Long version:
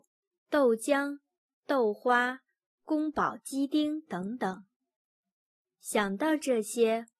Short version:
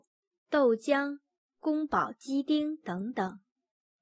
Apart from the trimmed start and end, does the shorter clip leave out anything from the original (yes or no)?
yes